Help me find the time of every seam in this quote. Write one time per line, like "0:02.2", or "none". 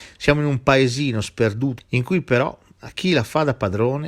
0:01.8
0:02.9